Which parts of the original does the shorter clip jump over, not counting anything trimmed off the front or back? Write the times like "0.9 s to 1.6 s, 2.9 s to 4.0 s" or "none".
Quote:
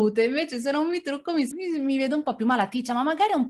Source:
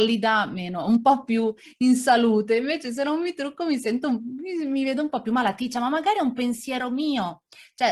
3.8 s to 4.4 s